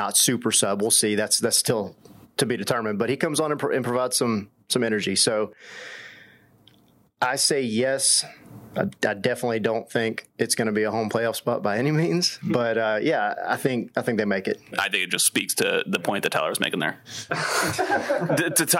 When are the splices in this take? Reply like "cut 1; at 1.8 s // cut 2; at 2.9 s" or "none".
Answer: cut 1; at 14.7 s // cut 2; at 17.3 s